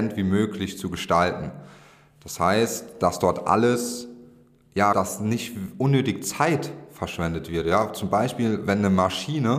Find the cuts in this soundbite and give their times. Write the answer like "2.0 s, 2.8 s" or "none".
4.9 s